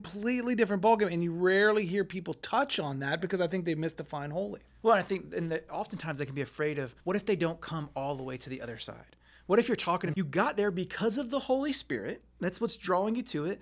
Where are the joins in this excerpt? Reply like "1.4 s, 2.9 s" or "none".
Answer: 7.0 s, 10.1 s